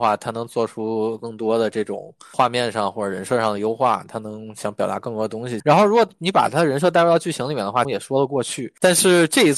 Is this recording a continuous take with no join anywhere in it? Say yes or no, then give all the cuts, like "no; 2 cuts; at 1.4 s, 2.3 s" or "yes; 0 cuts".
no; 2 cuts; at 5.6 s, 7.8 s